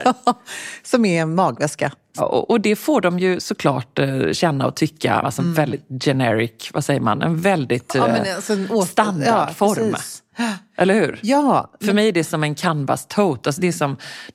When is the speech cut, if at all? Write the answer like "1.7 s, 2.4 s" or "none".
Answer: 2.2 s, 5.2 s